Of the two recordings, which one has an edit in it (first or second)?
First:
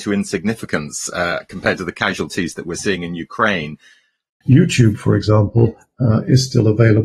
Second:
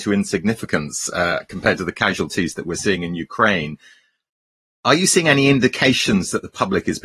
first